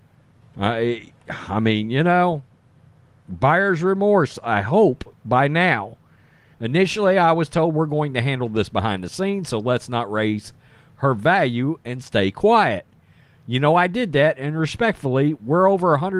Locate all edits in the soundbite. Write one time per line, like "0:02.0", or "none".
0:06.5

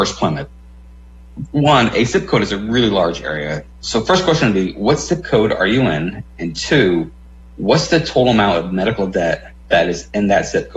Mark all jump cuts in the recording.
0:09.6

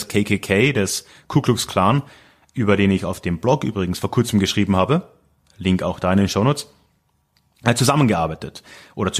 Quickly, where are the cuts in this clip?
none

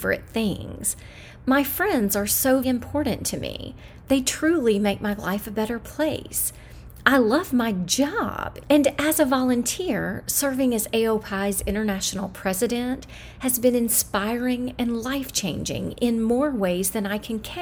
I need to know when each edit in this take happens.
0:02.6

